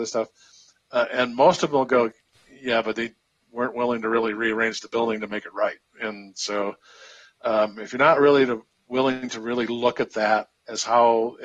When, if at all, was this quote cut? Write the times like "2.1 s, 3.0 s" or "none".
5.8 s